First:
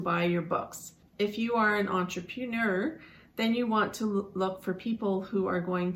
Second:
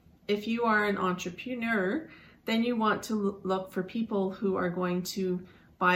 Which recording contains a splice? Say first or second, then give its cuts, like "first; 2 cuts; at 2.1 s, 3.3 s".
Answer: first; 1 cut; at 1.0 s